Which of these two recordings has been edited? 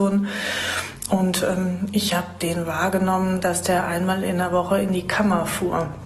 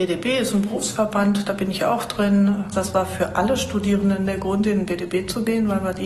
second; 1 cut; at 2.7 s

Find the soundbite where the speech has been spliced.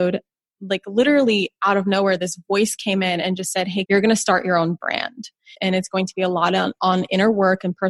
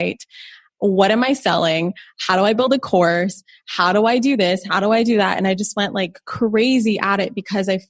first; 2 cuts; at 3.8 s, 5.5 s

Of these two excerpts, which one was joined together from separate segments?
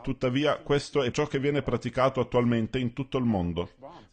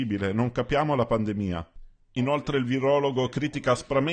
first; 1 cut; at 1.1 s

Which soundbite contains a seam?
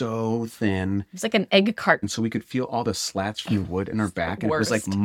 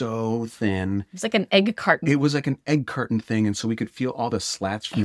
first; 1 cut; at 2.0 s

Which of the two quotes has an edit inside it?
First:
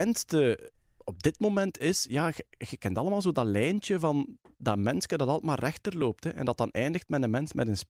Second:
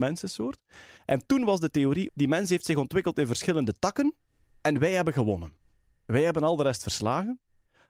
second; 1 cut; at 2.1 s

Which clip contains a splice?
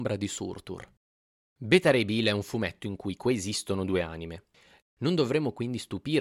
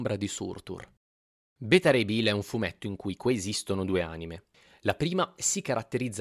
first; 1 cut; at 4.8 s

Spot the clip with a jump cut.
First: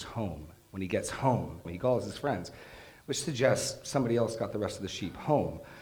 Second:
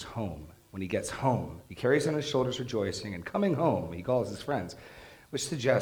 first; 1 cut; at 1.7 s

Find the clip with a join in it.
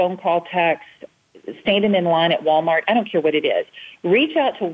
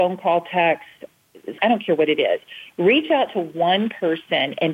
second; 1 cut; at 1.6 s

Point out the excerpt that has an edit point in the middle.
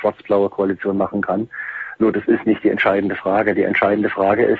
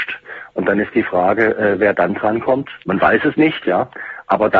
second; 1 cut; at 2.8 s

